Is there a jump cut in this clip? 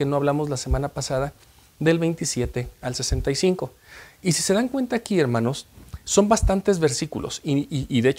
no; 0 cuts

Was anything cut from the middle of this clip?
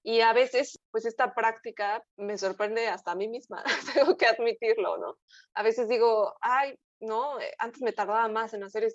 yes; 1 cut; at 2.1 s

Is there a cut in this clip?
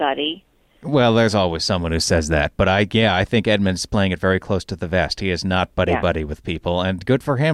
no; 0 cuts

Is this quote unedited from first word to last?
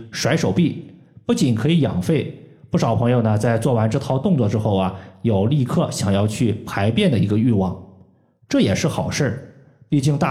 yes; 0 cuts

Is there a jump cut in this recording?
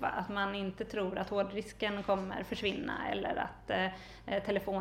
no; 0 cuts

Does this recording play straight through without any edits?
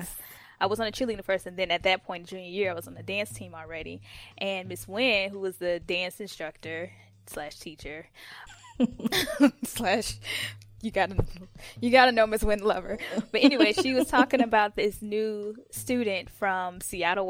no; 1 cut; at 8.5 s

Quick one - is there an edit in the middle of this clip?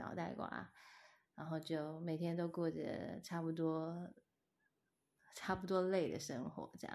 no; 0 cuts

